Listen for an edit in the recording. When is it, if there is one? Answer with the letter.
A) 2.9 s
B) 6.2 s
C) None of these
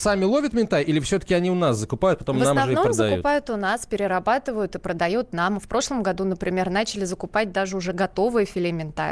C